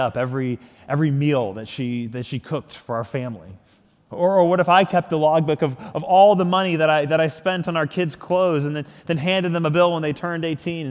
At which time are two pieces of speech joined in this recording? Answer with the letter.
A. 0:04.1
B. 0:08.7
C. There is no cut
A